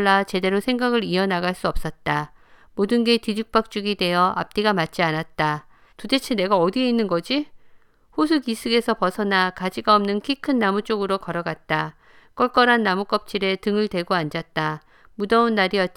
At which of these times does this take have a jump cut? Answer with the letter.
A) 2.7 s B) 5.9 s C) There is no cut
B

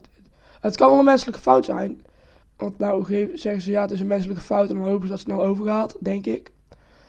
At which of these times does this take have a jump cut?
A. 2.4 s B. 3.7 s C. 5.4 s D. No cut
A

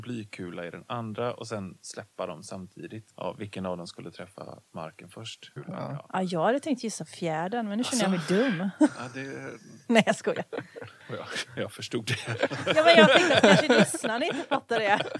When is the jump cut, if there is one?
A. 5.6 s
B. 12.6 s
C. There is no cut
A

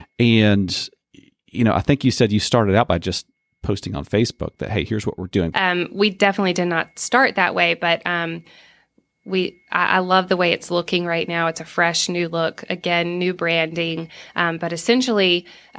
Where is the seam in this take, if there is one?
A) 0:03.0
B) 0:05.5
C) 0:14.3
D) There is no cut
B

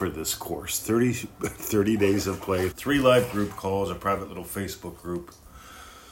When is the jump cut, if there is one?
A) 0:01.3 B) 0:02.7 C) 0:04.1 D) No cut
B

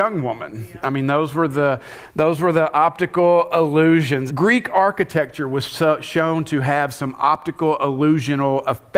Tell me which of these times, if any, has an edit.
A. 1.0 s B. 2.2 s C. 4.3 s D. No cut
C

